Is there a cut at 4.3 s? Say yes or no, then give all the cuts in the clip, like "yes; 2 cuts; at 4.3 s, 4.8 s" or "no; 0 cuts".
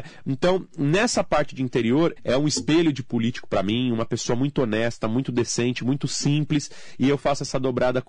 no; 1 cut; at 2.2 s